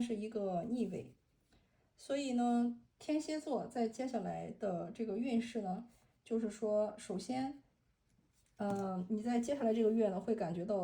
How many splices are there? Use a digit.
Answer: 0